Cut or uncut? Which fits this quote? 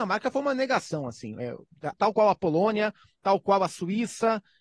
cut